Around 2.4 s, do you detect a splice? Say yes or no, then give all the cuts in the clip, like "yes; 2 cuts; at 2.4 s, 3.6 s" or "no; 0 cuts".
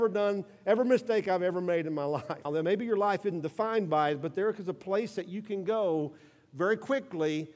yes; 1 cut; at 2.4 s